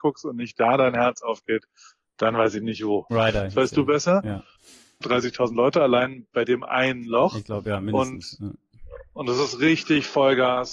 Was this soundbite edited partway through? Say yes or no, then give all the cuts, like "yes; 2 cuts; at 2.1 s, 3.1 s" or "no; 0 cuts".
yes; 2 cuts; at 3.1 s, 5.0 s